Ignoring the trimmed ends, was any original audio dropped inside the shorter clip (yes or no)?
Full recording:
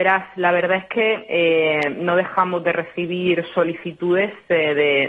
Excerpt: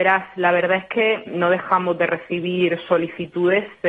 yes